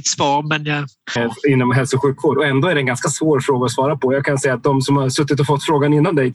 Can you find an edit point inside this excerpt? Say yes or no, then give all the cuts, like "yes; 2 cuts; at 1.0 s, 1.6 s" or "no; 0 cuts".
yes; 1 cut; at 1.2 s